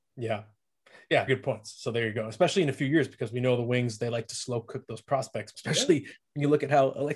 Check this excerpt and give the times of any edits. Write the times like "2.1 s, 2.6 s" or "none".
1.3 s, 5.5 s

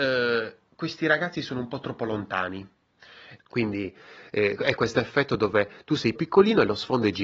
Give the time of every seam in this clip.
3.4 s, 6.2 s

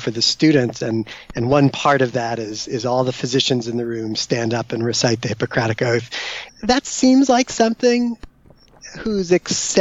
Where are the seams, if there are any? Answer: 6.5 s

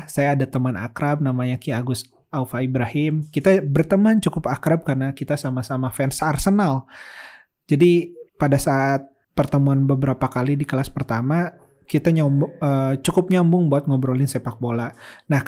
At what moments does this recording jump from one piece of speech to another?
8.3 s

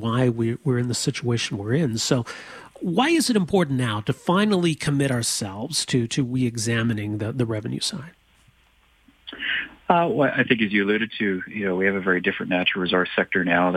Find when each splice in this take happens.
none

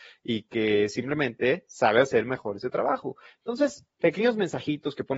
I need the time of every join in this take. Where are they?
4.0 s

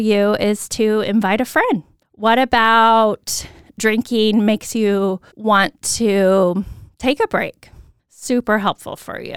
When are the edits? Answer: 2.0 s, 5.3 s, 8.0 s

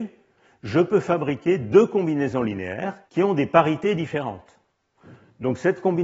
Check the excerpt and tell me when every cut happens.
3.0 s

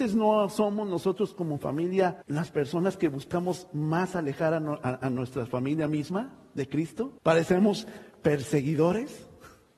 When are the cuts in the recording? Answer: 2.2 s, 7.2 s

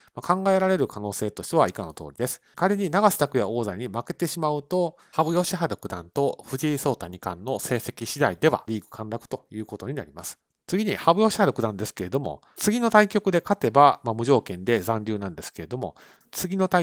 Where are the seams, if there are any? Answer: 2.5 s

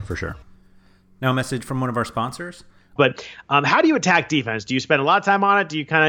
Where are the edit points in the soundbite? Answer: 3.0 s

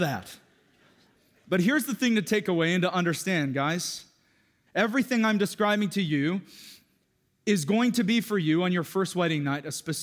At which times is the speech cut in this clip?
4.7 s

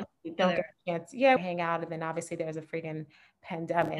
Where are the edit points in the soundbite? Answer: 1.4 s

